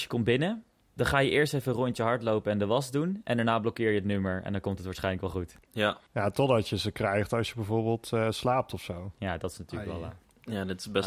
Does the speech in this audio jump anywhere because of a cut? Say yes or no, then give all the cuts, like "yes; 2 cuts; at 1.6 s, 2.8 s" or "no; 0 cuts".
no; 0 cuts